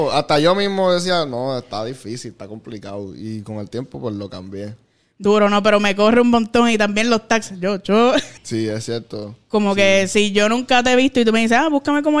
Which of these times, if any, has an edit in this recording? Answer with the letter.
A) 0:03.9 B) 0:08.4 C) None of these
B